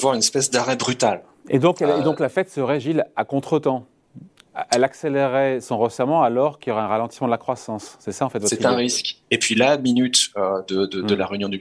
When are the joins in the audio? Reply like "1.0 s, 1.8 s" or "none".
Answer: 9.2 s